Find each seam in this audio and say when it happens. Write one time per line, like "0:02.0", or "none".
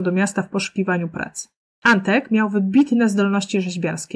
0:01.7